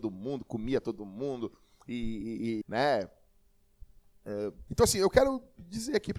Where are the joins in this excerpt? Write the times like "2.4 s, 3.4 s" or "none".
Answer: 2.6 s, 4.7 s